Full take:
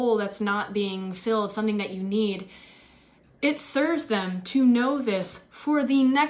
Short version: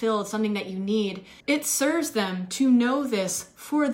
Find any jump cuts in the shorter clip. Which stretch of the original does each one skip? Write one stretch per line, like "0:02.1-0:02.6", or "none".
0:02.6-0:03.3